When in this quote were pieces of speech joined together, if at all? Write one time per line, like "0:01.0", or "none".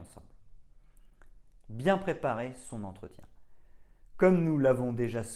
0:01.6